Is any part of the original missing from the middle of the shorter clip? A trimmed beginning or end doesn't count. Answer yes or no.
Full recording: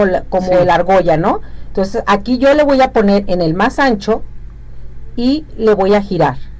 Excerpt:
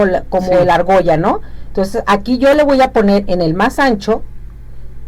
no